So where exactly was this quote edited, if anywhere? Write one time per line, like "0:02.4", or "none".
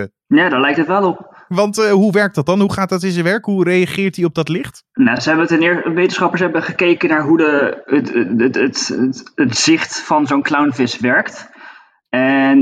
none